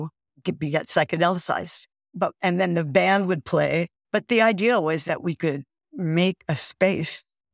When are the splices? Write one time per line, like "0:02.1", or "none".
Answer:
0:04.0
0:05.0